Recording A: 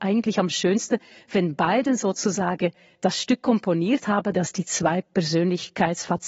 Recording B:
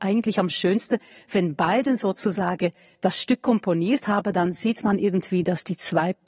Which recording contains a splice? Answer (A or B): A